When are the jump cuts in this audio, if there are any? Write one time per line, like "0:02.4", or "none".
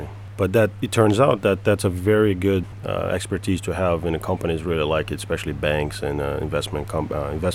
none